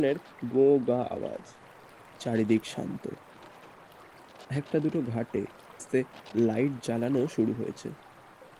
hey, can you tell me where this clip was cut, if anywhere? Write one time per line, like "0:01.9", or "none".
0:05.8